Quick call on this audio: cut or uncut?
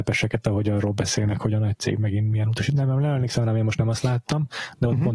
uncut